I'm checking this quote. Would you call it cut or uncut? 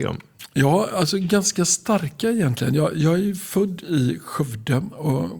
uncut